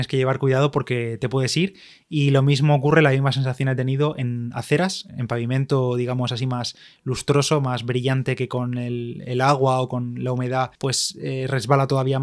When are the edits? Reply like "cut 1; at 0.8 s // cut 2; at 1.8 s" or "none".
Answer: cut 1; at 5.1 s // cut 2; at 10.8 s